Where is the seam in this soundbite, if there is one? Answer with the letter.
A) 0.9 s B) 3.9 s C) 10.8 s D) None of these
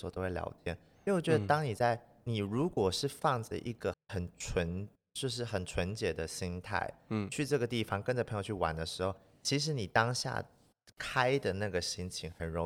B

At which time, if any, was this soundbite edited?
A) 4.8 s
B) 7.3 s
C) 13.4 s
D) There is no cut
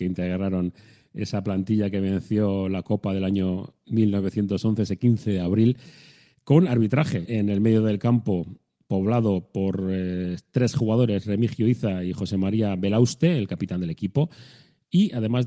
B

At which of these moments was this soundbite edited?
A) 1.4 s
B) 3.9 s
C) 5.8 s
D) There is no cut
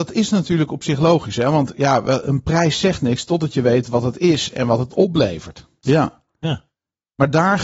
C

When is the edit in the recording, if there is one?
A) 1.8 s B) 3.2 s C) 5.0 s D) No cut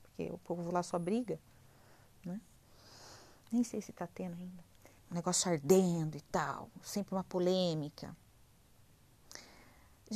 C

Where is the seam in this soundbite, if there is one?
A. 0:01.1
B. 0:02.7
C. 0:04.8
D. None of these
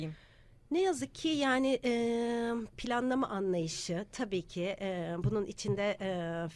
B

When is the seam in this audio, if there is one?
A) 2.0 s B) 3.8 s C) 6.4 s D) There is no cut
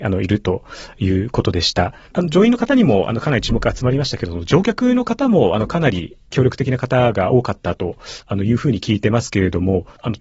A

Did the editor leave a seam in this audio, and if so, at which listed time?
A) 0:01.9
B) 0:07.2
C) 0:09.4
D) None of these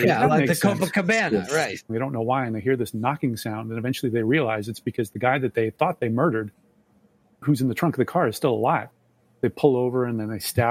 A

